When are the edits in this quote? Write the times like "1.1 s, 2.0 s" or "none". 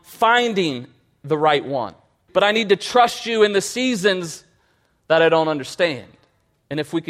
2.3 s